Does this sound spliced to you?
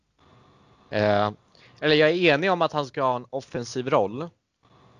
yes; 1 cut; at 1.6 s

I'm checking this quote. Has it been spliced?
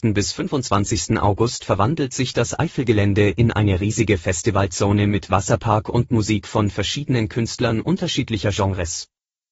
no; 0 cuts

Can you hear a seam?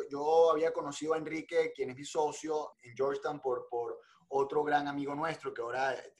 no; 0 cuts

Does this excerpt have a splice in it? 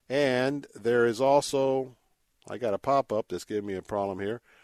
no; 0 cuts

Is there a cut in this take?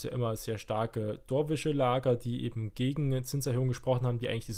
no; 0 cuts

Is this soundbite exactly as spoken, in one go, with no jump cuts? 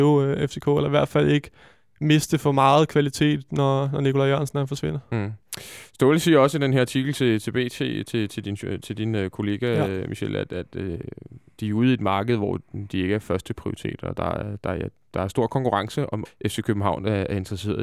no; 1 cut; at 16.3 s

